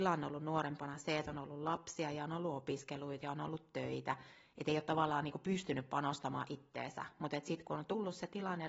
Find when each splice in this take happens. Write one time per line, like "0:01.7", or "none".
none